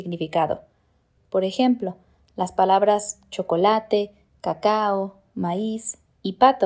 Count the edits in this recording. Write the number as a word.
one